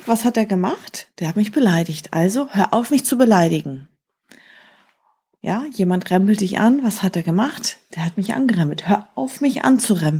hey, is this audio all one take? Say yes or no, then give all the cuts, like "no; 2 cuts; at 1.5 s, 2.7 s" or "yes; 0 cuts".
yes; 0 cuts